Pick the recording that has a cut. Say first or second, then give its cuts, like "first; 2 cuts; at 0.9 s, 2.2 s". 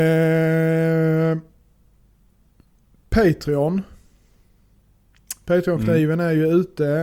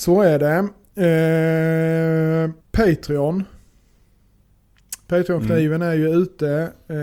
second; 1 cut; at 2.6 s